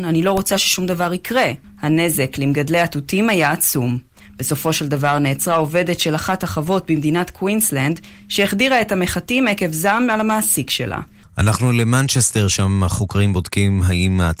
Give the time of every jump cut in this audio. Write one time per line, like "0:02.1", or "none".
0:01.6
0:11.2